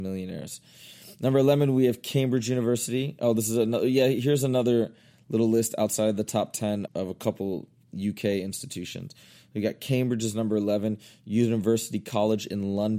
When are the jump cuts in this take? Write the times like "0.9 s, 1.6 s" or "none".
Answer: 6.9 s